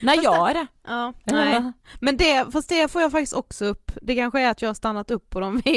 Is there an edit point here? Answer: yes; 1 cut; at 1.2 s

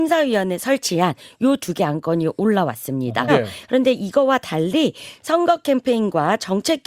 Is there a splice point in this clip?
yes; 1 cut; at 3.3 s

